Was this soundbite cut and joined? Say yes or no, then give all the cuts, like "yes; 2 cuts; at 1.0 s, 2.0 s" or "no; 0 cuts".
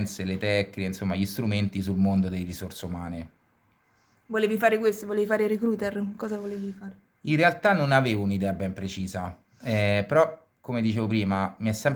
no; 0 cuts